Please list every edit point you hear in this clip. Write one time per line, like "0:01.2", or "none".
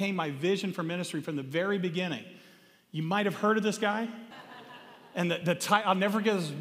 0:04.3